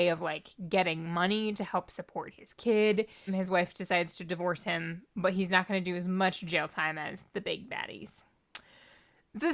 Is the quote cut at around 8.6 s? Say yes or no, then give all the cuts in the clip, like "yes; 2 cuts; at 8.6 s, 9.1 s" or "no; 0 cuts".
no; 1 cut; at 3.3 s